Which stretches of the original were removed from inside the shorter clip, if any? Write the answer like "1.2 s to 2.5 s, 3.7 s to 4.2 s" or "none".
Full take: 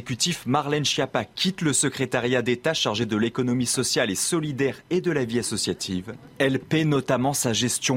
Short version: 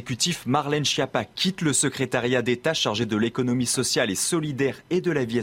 none